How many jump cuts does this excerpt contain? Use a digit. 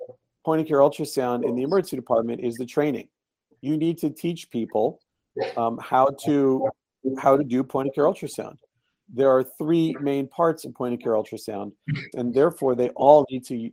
2